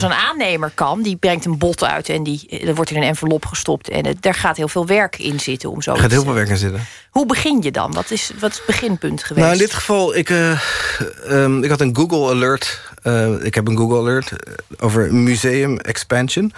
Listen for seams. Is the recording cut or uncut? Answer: uncut